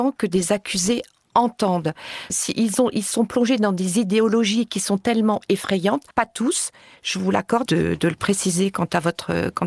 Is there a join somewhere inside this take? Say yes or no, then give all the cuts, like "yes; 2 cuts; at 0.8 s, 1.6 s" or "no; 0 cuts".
yes; 3 cuts; at 2.3 s, 6.1 s, 7.7 s